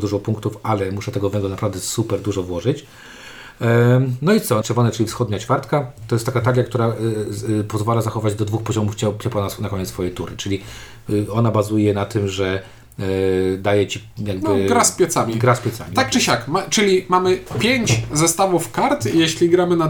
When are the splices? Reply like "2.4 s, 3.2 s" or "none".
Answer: 4.6 s